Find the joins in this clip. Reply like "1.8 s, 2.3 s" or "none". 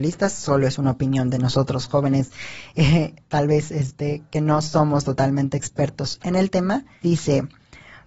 7.0 s